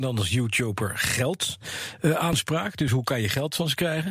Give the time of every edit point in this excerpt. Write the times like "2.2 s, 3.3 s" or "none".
none